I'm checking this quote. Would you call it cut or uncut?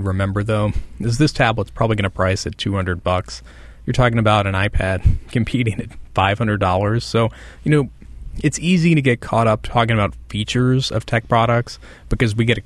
uncut